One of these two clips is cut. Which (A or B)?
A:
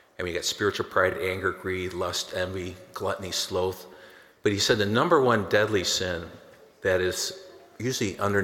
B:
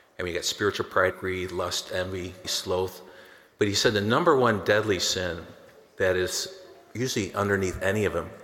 B